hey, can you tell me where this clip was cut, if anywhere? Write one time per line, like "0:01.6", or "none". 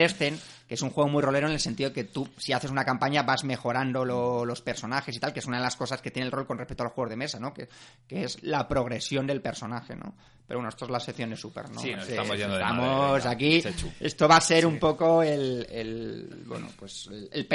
none